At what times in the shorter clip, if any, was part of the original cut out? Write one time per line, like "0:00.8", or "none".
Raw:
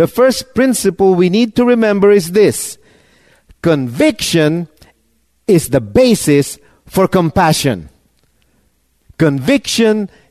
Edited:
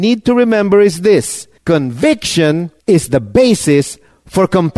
0:01.6
0:02.8